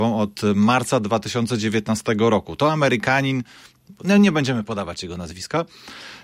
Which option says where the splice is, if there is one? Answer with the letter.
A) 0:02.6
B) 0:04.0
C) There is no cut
C